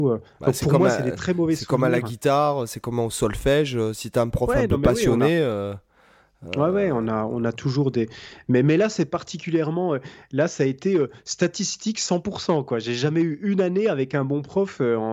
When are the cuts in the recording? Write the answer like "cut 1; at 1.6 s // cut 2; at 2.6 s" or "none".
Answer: none